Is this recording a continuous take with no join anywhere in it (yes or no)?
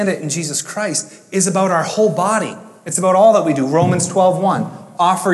yes